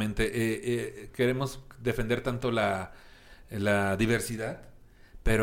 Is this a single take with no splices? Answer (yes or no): yes